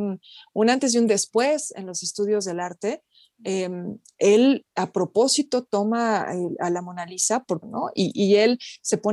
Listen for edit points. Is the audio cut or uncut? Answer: cut